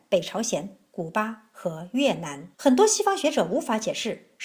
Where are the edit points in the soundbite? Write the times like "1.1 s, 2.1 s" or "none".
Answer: 2.5 s